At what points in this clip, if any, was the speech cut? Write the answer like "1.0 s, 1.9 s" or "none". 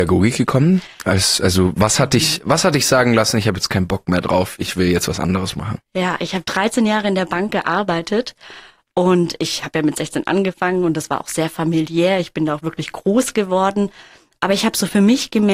none